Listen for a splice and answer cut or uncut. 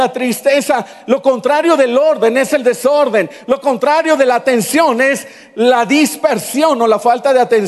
uncut